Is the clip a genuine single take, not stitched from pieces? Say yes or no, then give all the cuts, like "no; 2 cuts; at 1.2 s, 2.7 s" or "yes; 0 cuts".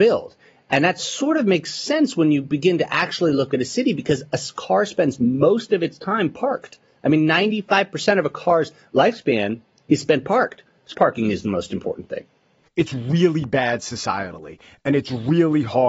no; 2 cuts; at 10.9 s, 12.7 s